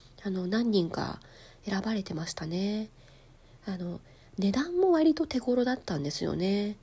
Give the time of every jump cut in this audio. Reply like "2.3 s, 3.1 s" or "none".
none